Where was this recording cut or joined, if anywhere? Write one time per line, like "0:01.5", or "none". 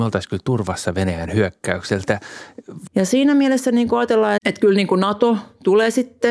0:02.9
0:04.4

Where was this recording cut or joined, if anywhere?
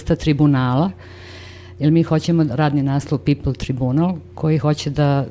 0:02.5

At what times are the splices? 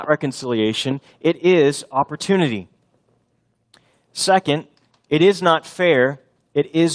none

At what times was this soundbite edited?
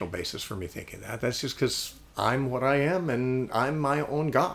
none

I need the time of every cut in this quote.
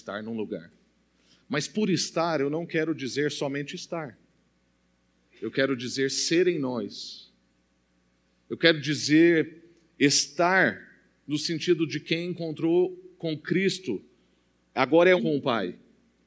0:15.2

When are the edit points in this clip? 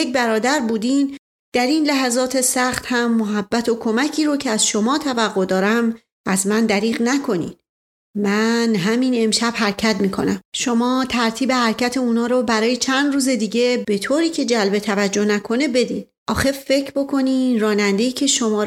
0:08.0
0:16.2

